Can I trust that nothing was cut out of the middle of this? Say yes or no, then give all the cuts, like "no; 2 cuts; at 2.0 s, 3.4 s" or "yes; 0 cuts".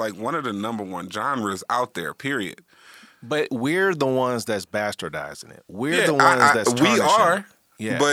yes; 0 cuts